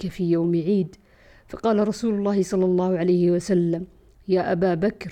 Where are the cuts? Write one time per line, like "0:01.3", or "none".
none